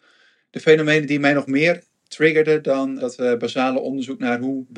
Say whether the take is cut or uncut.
cut